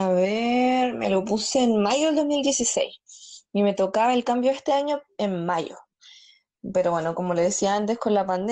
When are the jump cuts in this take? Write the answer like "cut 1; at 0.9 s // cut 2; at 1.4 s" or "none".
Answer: none